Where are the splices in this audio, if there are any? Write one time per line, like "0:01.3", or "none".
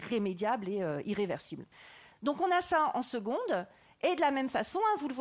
none